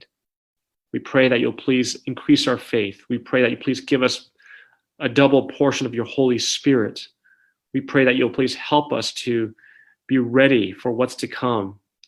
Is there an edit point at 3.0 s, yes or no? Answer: no